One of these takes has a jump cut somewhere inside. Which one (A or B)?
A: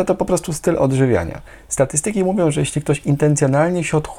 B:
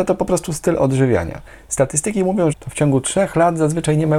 B